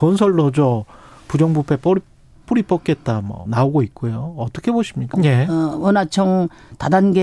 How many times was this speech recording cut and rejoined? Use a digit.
2